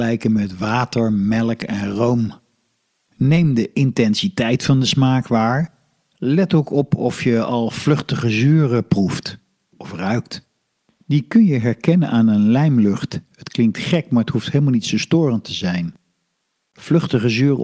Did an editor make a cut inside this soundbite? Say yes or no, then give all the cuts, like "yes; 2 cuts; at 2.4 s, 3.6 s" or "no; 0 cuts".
no; 0 cuts